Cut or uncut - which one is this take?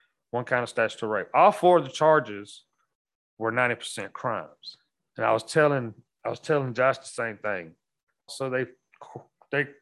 cut